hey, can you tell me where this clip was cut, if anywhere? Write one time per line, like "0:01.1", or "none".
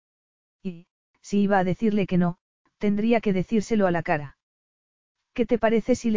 none